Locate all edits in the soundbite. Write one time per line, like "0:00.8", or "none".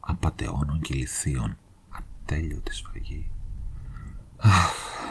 0:01.9